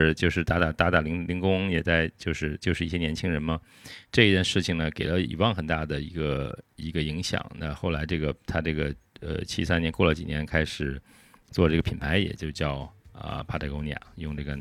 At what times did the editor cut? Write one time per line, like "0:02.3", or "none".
none